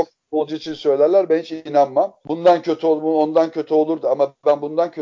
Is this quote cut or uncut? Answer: cut